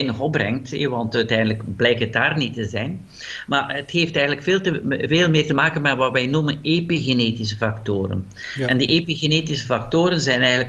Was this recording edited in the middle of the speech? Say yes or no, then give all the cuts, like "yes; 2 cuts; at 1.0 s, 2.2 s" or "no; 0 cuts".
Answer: no; 0 cuts